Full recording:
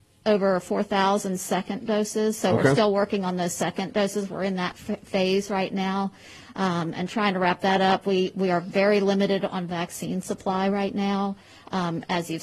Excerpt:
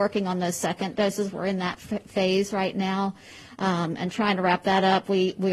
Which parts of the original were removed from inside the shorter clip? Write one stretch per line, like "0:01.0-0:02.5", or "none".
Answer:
none